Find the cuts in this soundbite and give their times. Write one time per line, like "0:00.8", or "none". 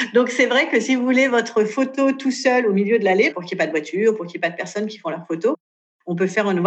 0:03.3

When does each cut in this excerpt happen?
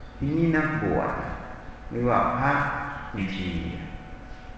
0:03.2

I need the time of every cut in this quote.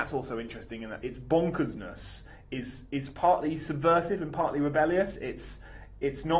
0:01.0

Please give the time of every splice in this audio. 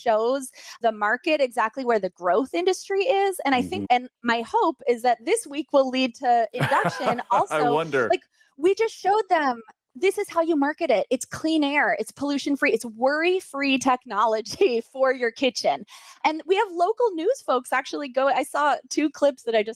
0:03.8

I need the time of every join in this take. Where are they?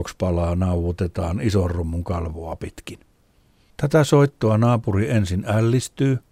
0:03.7

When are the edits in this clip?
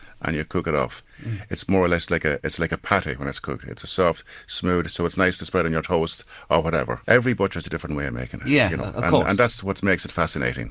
0:07.0

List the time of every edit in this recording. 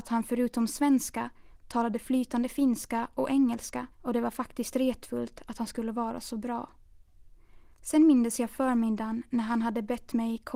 0:03.9

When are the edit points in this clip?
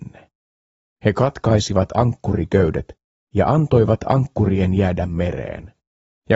none

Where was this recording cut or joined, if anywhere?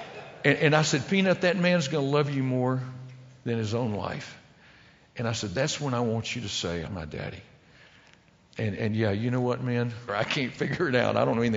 0:06.9
0:10.1

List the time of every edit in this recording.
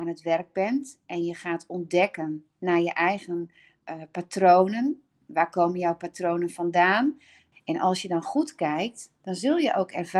0:05.2
0:07.5

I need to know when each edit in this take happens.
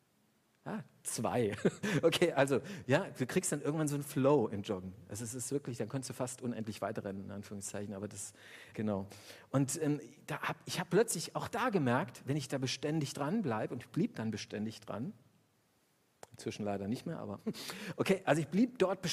0:08.7

